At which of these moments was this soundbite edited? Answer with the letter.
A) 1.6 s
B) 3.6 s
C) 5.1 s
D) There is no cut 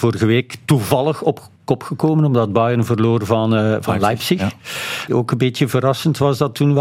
C